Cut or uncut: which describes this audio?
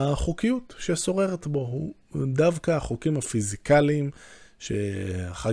uncut